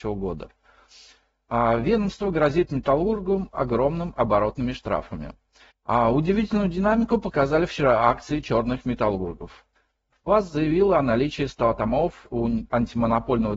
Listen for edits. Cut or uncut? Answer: cut